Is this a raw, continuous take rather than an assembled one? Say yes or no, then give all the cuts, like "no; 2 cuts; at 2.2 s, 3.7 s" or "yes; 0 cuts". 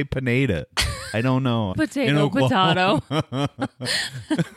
no; 1 cut; at 1.7 s